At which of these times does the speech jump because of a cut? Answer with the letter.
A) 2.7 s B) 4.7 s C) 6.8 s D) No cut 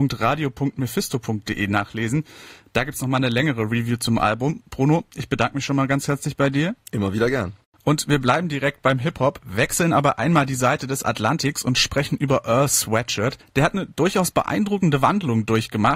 D